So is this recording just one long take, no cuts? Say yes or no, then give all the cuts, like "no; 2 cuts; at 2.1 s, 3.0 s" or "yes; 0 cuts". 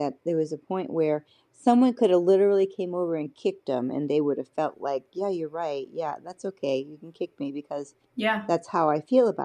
yes; 0 cuts